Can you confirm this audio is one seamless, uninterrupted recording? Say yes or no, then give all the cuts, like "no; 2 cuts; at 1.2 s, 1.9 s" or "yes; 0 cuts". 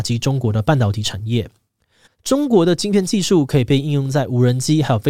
no; 1 cut; at 2.0 s